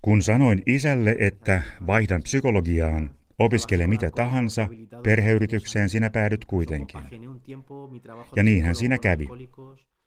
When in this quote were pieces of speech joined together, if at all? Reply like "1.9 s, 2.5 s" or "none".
3.3 s